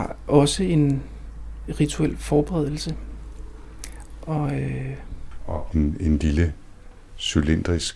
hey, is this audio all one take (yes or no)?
no